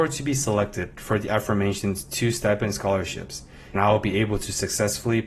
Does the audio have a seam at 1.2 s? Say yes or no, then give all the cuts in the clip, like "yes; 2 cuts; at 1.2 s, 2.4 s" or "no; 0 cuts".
no; 1 cut; at 3.8 s